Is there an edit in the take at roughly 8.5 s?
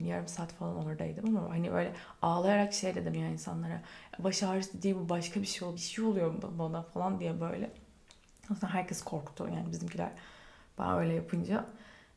no; 1 cut; at 5.8 s

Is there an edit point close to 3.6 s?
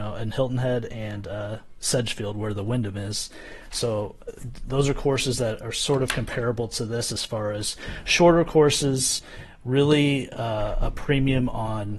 no; 0 cuts

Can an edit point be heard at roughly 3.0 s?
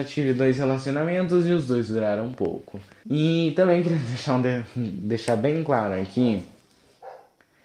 yes; 1 cut; at 3.0 s

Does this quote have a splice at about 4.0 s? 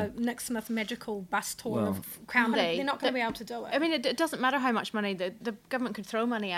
no; 2 cuts; at 2.5 s, 5.4 s

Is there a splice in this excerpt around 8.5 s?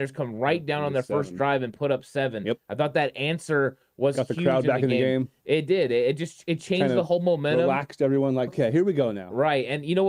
yes; 1 cut; at 8.5 s

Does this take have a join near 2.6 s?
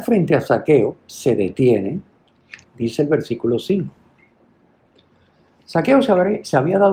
yes; 1 cut; at 2.6 s

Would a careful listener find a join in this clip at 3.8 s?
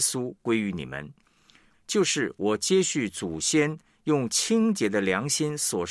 no; 1 cut; at 1.7 s

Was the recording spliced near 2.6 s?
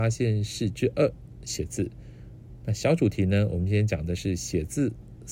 no; 0 cuts

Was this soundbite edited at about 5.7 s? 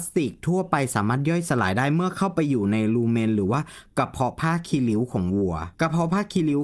yes; 1 cut; at 5.7 s

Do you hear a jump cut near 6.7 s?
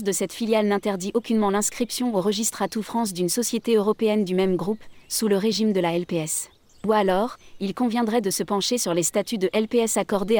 yes; 1 cut; at 6.7 s

